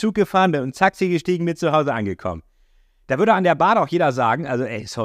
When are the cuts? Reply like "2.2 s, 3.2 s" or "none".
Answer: none